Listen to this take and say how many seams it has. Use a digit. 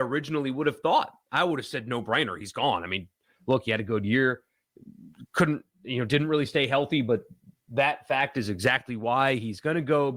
0